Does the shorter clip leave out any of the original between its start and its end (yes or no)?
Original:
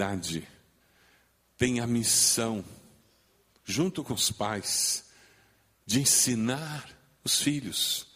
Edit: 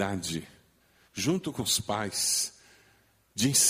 yes